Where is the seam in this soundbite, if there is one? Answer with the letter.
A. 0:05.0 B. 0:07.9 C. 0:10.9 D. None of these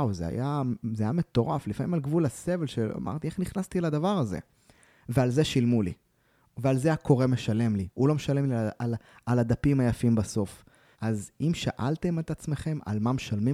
C